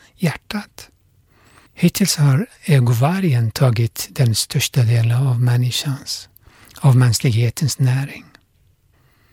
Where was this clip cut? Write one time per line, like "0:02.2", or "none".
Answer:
0:01.7